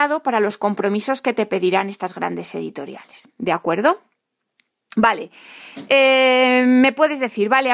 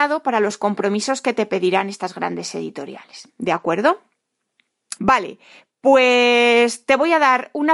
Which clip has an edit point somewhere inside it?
second; 1 cut; at 5.0 s

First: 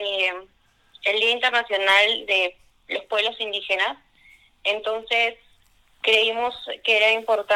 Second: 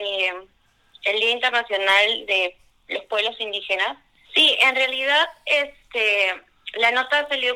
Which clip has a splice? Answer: second; 1 cut; at 4.2 s

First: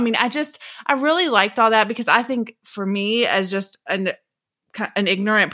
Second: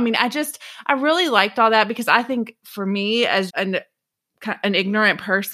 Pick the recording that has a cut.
second; 1 cut; at 3.5 s

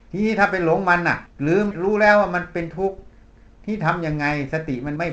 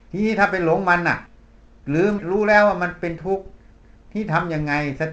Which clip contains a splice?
first; 1 cut; at 1.3 s

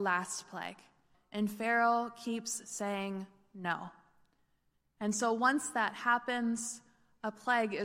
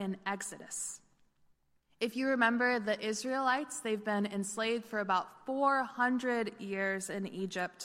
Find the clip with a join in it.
first; 1 cut; at 1.1 s

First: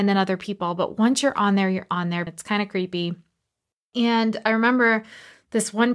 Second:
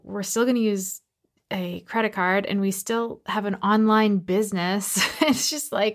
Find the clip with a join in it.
first; 1 cut; at 2.3 s

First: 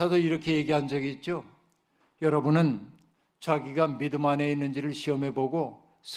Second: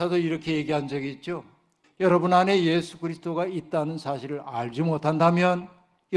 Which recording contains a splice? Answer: second; 1 cut; at 1.8 s

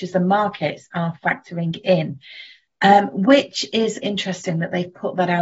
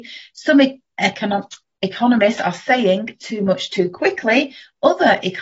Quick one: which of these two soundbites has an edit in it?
first; 1 cut; at 4.0 s

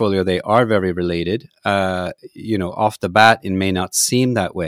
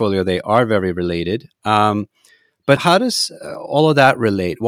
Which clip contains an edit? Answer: second; 2 cuts; at 1.5 s, 2.8 s

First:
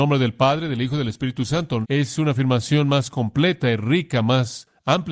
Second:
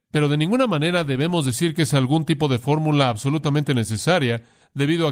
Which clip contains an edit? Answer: first; 1 cut; at 1.8 s

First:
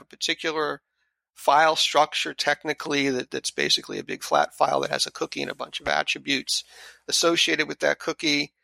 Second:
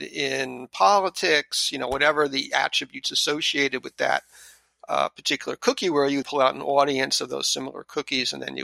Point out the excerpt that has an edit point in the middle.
second; 1 cut; at 6.2 s

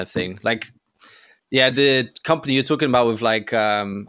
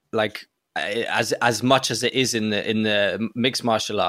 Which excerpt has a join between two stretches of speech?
first; 1 cut; at 1.7 s

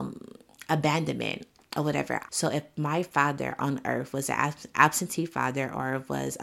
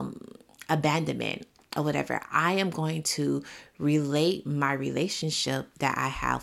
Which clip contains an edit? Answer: first; 1 cut; at 2.3 s

